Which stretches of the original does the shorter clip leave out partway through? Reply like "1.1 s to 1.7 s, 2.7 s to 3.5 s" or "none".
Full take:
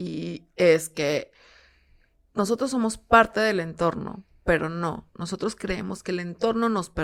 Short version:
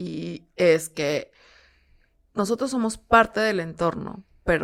none